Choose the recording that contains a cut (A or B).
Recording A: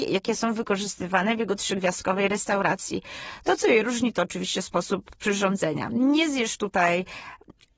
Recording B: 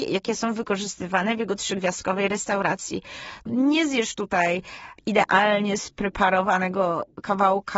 B